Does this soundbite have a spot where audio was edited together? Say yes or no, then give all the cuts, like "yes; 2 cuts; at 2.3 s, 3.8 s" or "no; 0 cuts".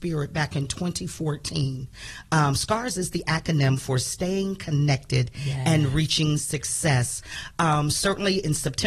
no; 0 cuts